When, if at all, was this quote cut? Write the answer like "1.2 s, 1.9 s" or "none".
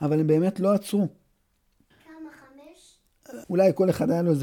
1.9 s, 3.4 s